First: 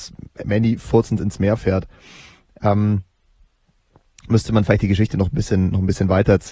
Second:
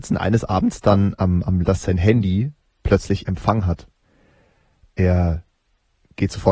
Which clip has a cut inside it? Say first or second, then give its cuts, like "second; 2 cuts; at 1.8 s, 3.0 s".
second; 1 cut; at 1.6 s